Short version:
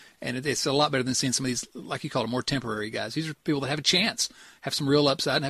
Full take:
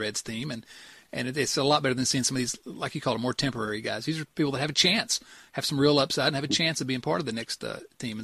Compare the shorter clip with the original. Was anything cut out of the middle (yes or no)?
no